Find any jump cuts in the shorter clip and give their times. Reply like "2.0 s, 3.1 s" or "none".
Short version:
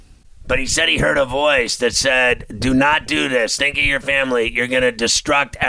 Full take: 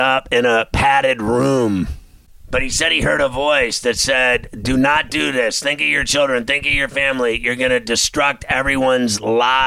3.6 s